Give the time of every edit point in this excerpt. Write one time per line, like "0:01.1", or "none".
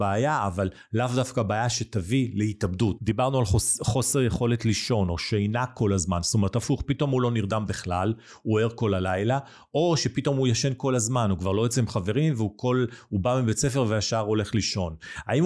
0:03.0